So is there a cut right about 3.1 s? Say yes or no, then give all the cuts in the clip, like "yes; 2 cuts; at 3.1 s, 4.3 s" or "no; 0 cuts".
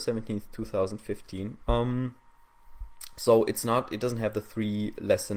no; 1 cut; at 1.7 s